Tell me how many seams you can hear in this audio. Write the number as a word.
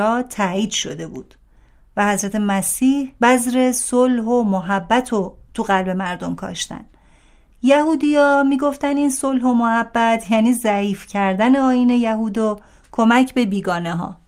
zero